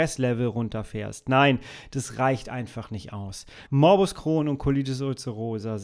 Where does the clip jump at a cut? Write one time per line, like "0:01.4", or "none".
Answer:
0:03.7